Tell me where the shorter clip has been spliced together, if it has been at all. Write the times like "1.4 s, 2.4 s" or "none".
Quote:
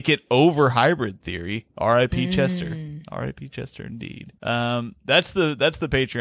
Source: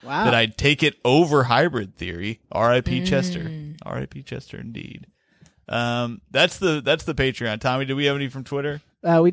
4.4 s